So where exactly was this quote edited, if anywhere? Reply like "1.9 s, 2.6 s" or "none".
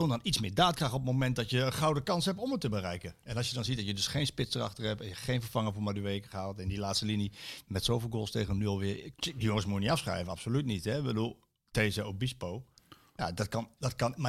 9.1 s